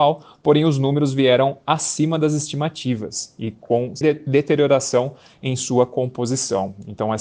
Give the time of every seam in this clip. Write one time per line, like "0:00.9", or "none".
0:04.0